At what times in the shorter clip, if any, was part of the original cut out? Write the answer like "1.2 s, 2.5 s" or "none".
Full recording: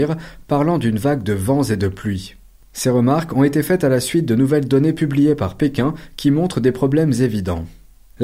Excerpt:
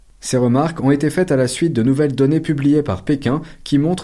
none